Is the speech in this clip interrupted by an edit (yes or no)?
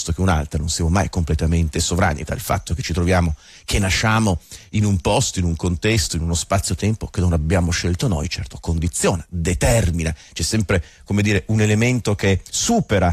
yes